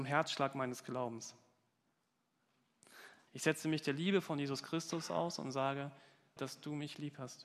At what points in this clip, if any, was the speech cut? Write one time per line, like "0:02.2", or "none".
0:03.3
0:06.4